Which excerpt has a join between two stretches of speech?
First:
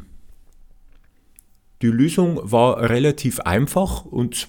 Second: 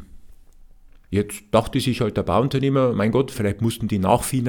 second; 2 cuts; at 1.1 s, 3.3 s

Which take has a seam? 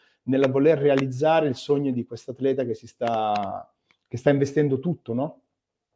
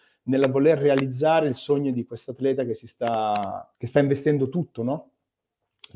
second; 1 cut; at 3.7 s

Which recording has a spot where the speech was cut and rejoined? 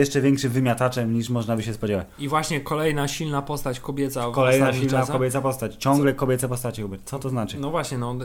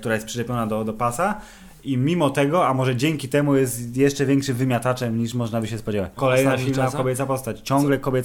second; 1 cut; at 6.2 s

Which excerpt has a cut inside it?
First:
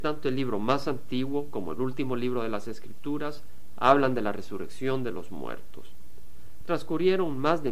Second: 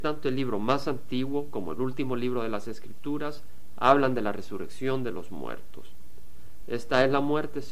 second; 1 cut; at 6.6 s

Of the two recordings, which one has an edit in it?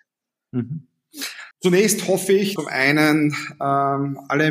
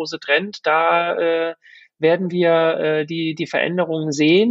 first; 2 cuts; at 1.5 s, 2.6 s

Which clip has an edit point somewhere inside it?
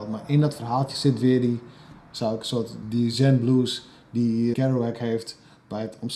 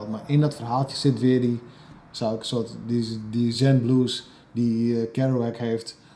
first; 2 cuts; at 2.8 s, 4.5 s

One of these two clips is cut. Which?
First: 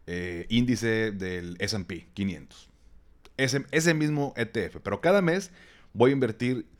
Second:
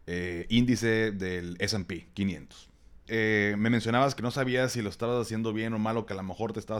second; 2 cuts; at 3.0 s, 4.2 s

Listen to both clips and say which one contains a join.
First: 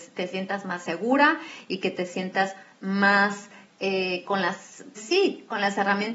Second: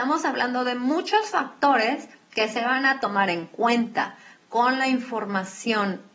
first; 1 cut; at 5.0 s

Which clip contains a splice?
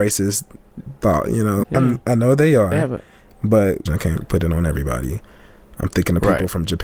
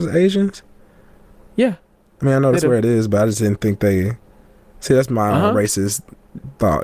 first; 2 cuts; at 1.6 s, 3.9 s

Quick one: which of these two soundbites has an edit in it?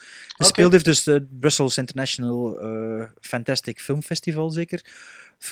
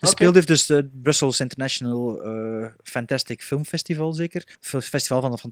second; 1 cut; at 4.6 s

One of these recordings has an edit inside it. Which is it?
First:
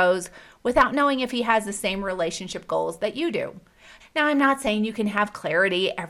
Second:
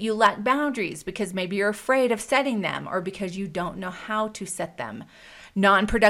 first; 1 cut; at 4.0 s

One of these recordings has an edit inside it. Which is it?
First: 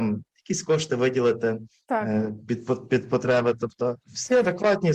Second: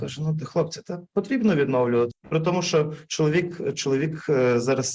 second; 1 cut; at 2.1 s

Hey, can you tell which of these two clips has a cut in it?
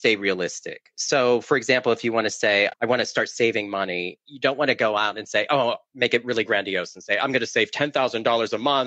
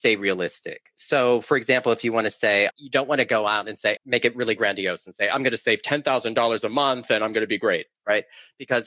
second; 2 cuts; at 2.7 s, 4.0 s

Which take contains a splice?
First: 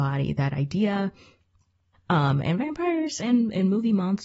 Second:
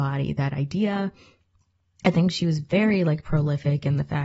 first; 1 cut; at 1.9 s

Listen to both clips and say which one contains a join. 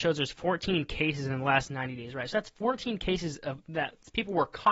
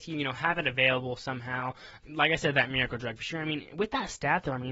second; 1 cut; at 2.0 s

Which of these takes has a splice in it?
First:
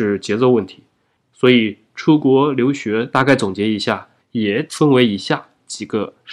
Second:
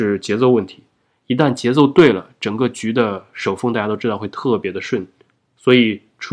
first; 1 cut; at 1.2 s

